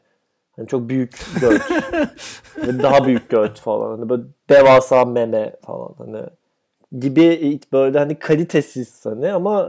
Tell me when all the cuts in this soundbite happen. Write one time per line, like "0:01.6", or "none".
none

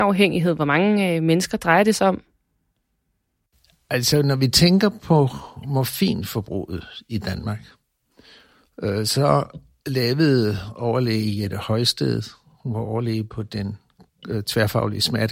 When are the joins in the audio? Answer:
none

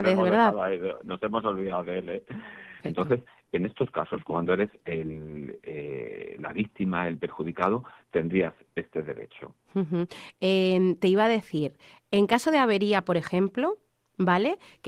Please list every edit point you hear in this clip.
0:02.8

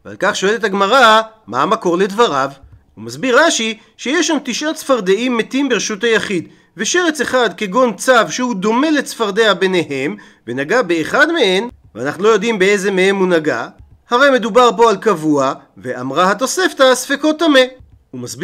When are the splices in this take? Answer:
0:01.4
0:02.9

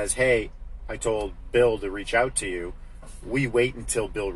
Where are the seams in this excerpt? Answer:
none

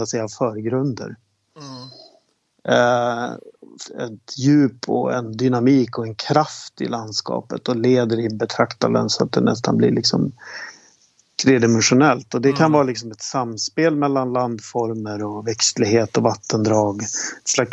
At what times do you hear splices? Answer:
0:03.8

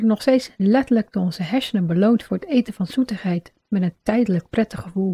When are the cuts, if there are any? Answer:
none

